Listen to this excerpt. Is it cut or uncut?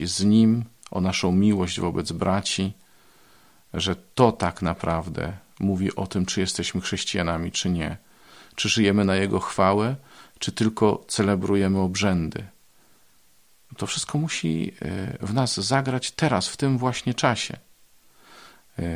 uncut